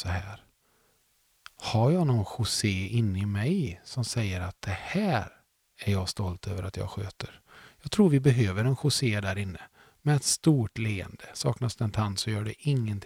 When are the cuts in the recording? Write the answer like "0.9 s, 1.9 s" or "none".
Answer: none